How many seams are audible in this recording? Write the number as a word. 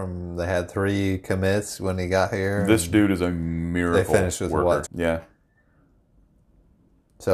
one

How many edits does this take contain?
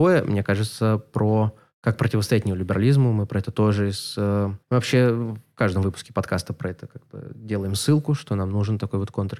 one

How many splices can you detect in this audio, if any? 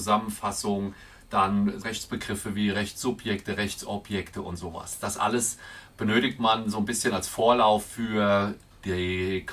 one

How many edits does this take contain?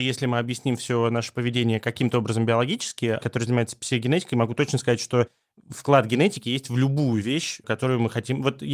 one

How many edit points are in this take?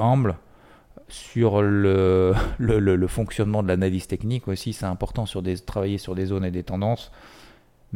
zero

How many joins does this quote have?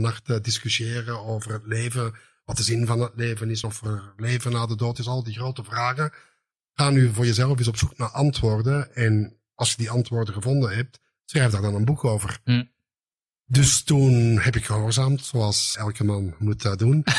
two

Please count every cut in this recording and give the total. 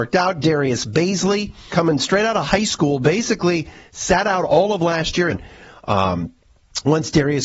two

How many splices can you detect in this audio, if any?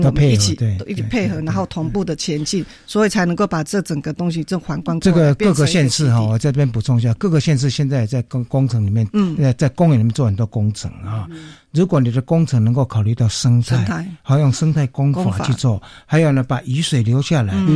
zero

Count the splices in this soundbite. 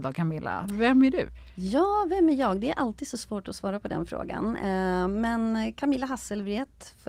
zero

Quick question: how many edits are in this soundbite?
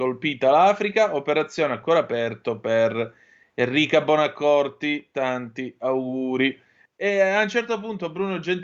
one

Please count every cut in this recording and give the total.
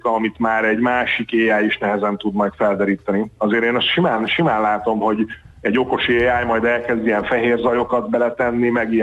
zero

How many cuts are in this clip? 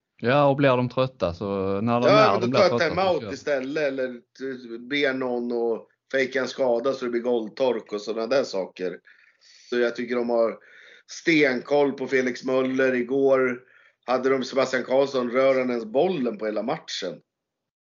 one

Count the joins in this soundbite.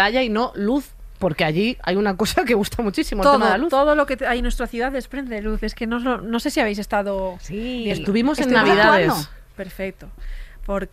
zero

